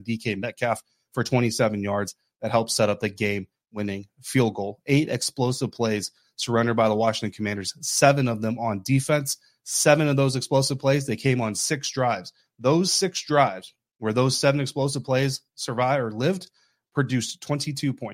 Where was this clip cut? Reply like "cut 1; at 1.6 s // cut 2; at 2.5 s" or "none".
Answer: none